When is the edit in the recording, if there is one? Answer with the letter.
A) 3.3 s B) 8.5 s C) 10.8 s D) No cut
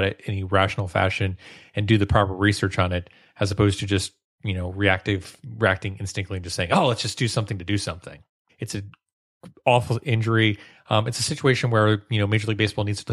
B